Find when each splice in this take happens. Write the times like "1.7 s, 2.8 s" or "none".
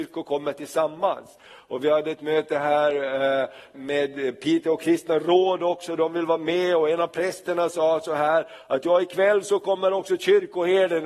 3.7 s